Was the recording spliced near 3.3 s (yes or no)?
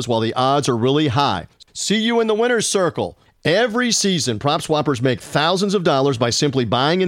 yes